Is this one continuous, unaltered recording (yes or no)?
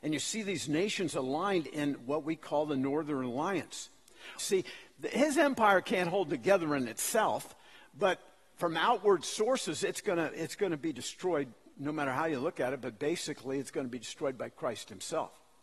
no